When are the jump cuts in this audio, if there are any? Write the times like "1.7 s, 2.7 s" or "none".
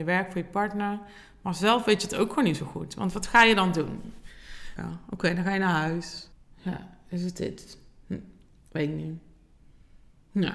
4.8 s, 6.3 s